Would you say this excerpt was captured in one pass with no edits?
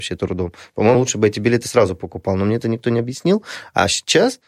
yes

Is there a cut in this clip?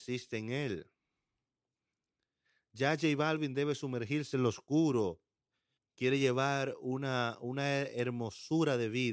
yes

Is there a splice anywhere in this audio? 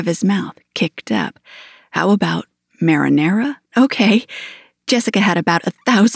yes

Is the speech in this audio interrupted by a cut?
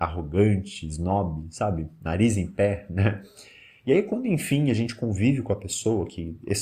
yes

